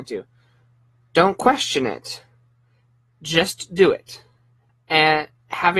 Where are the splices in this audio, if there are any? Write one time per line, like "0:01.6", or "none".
0:04.7